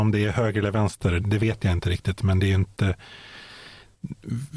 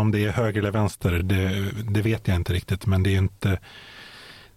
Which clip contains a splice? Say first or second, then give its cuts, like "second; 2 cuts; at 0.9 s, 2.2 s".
first; 1 cut; at 1.2 s